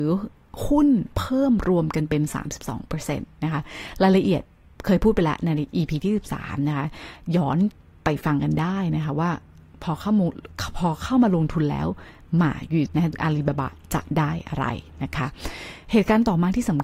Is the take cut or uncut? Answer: cut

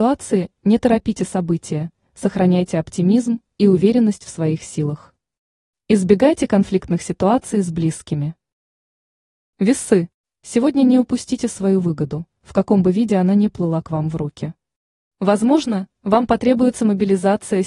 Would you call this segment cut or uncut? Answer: uncut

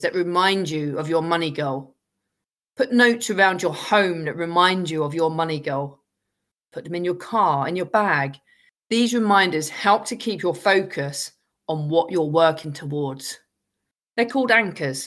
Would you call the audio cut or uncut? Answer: uncut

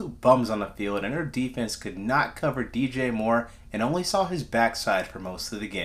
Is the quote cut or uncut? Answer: uncut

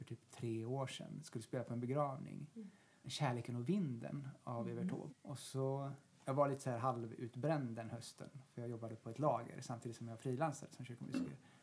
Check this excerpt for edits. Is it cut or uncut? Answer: cut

